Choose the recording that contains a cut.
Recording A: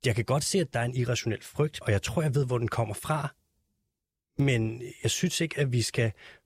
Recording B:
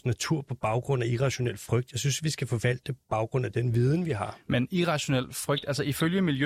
A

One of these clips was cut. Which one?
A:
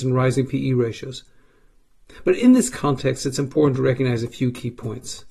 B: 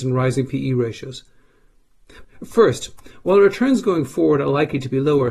B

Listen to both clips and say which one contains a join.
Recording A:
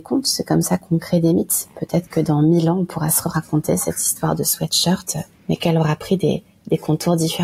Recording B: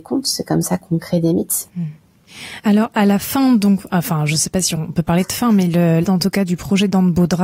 B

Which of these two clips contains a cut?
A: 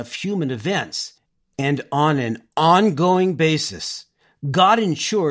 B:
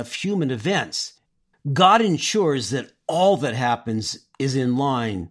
B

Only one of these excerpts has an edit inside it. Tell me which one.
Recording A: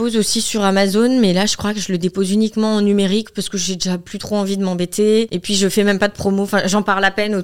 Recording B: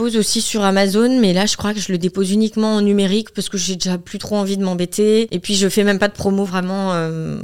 B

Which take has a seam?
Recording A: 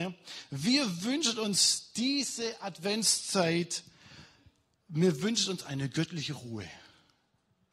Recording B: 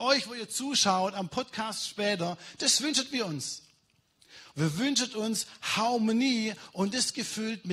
B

